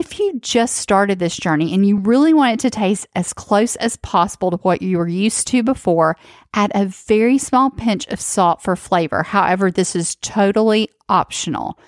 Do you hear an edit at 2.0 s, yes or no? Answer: no